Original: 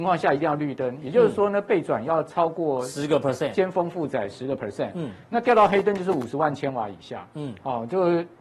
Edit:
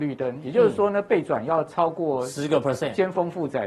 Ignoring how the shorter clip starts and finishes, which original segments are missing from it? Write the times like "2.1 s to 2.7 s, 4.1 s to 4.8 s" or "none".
none